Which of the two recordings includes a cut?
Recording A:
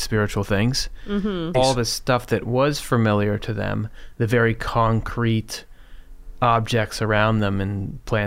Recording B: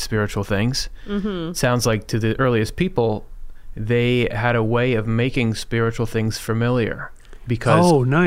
A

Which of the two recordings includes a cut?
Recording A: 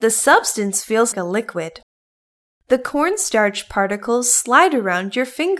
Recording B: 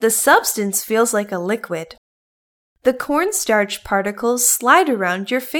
A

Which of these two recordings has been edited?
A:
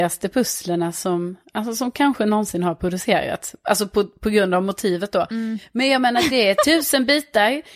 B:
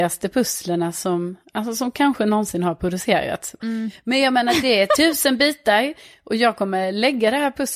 B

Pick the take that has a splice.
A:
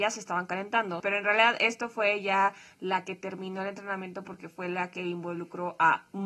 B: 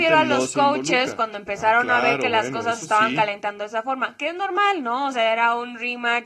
A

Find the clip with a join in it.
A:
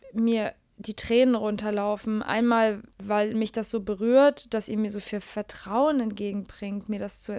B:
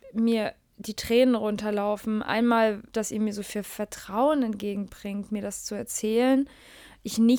B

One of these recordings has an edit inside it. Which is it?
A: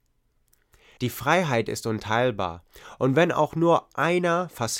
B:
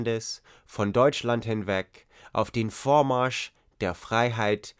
A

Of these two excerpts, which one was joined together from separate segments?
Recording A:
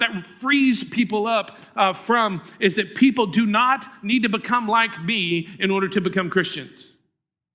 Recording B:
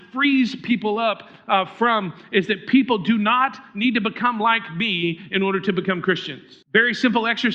B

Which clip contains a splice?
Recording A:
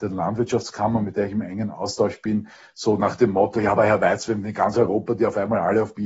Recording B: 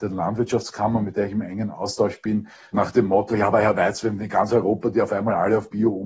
B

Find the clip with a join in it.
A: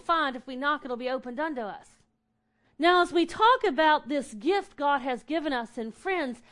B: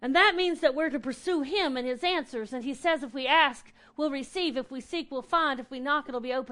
A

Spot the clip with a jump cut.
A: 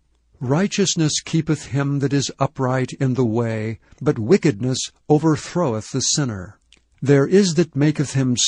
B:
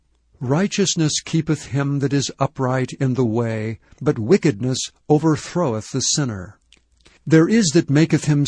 A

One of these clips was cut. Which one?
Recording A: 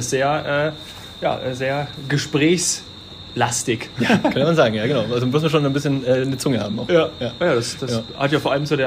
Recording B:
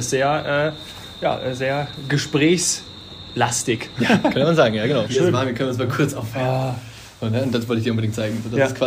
B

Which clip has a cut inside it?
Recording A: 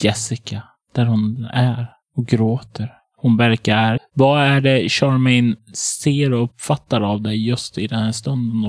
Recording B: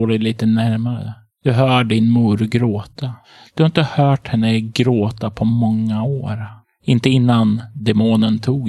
A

